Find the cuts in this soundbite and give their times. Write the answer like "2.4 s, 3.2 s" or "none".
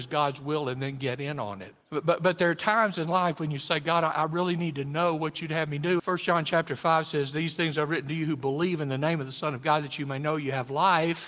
1.8 s, 6.0 s